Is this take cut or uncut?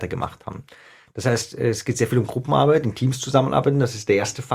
uncut